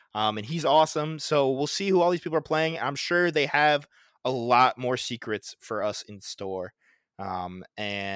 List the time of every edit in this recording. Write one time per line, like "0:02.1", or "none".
none